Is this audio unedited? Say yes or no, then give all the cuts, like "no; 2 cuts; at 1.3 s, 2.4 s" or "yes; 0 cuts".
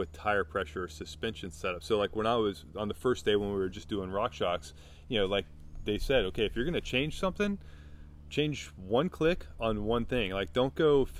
yes; 0 cuts